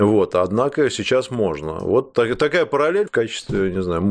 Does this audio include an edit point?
yes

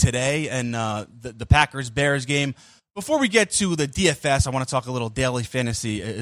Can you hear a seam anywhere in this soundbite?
no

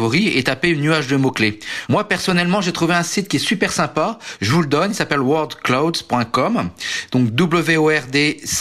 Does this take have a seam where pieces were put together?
no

